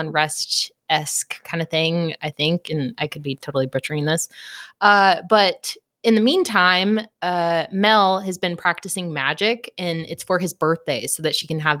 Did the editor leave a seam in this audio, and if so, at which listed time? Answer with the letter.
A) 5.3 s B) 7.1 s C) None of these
C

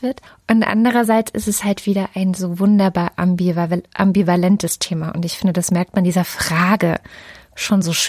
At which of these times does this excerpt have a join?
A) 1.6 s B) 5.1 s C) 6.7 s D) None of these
D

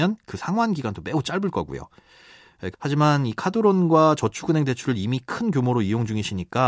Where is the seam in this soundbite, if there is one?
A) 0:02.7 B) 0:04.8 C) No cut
A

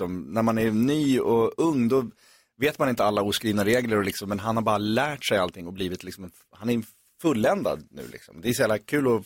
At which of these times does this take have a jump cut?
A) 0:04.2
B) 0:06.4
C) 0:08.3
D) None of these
D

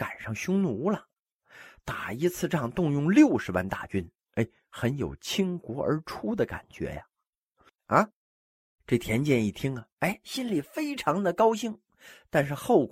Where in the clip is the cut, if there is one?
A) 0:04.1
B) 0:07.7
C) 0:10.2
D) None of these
B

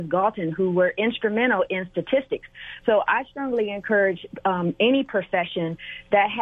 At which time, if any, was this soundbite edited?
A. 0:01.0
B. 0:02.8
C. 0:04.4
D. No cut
B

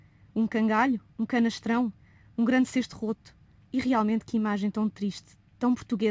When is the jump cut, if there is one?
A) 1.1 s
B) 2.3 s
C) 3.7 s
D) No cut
C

